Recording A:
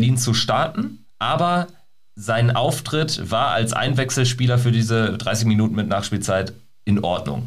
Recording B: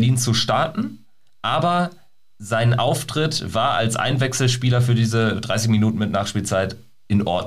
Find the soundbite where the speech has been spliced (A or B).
A